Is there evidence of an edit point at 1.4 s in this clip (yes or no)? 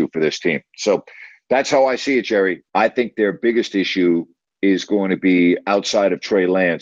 no